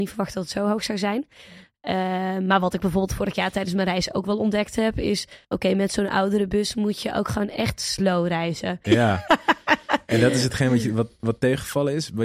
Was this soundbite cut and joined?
yes; 2 cuts; at 5.4 s, 8.8 s

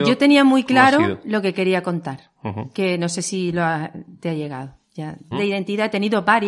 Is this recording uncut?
no; 1 cut; at 5.3 s

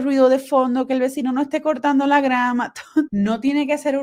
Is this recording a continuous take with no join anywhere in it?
no; 1 cut; at 3.1 s

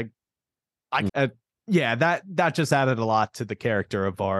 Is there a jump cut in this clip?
yes; 1 cut; at 1.1 s

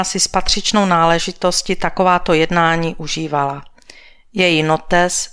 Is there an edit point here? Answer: no; 0 cuts

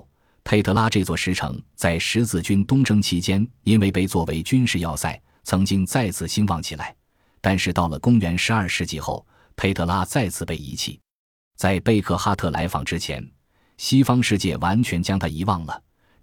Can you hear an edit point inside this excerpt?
no; 0 cuts

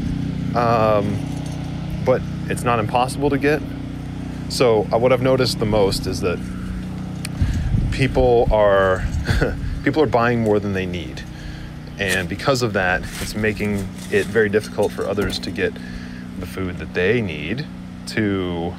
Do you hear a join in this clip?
no; 0 cuts

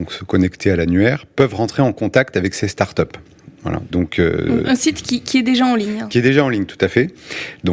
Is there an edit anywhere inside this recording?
yes; 1 cut; at 3.9 s

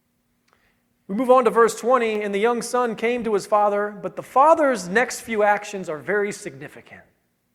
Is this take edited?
no; 0 cuts

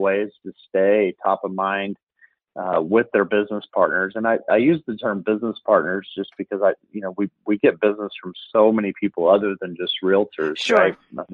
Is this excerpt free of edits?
yes; 0 cuts

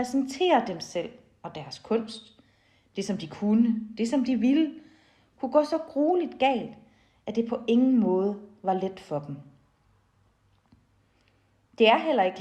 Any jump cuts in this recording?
no; 0 cuts

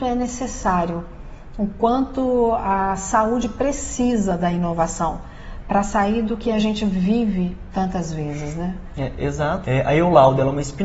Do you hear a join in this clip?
yes; 1 cut; at 9.6 s

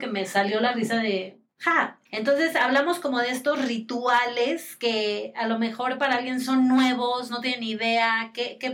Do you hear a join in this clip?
yes; 1 cut; at 2.1 s

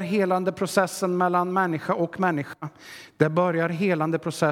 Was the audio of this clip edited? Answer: no; 0 cuts

